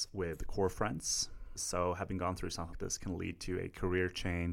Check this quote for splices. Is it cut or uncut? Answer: cut